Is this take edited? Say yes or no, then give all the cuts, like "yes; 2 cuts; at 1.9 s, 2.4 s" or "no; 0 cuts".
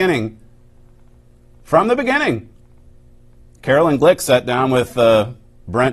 no; 0 cuts